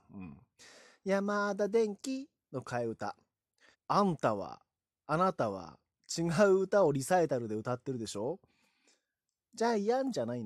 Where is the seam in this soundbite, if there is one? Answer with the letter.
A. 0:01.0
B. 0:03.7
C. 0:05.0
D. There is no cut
B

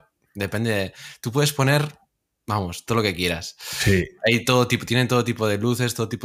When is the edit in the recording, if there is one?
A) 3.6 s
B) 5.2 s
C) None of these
C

